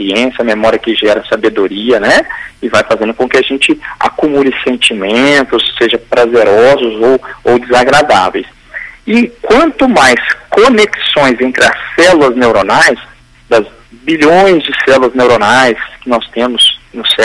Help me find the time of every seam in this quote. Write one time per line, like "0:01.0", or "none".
none